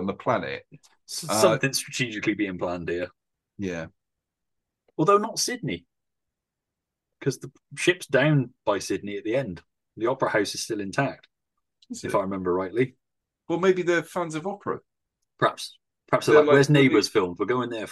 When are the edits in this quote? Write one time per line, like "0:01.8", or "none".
none